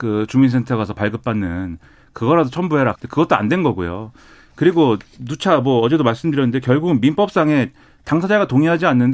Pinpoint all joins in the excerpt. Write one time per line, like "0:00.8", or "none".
0:02.9